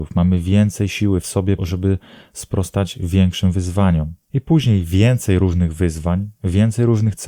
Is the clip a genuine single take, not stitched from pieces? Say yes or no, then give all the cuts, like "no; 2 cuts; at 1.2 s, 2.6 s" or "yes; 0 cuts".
no; 2 cuts; at 1.6 s, 4.2 s